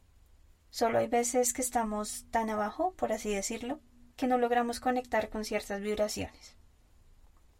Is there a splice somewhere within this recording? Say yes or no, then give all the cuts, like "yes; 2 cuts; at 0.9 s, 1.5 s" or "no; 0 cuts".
yes; 1 cut; at 4.1 s